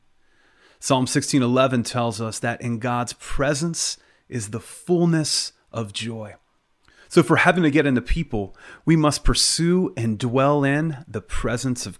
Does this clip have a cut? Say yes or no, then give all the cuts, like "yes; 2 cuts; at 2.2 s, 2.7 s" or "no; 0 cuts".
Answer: no; 0 cuts